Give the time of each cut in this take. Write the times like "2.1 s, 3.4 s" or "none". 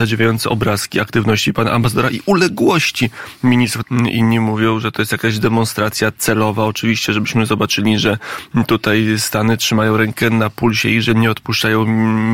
3.8 s